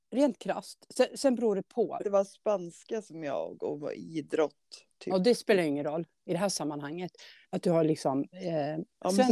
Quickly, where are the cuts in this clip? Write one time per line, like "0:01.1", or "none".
0:02.0
0:07.5